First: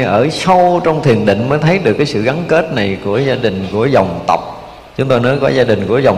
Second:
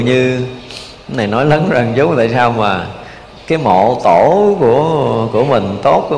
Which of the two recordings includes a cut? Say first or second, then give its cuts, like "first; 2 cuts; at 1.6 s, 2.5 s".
first; 1 cut; at 4.9 s